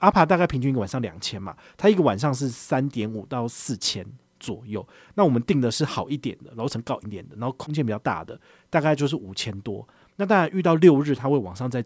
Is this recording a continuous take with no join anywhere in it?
no; 1 cut; at 7.0 s

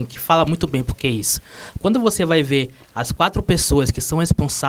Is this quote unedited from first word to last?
yes; 0 cuts

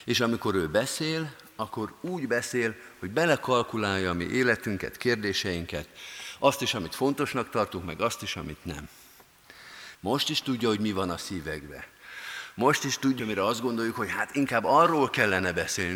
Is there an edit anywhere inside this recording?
yes; 2 cuts; at 9.9 s, 13.2 s

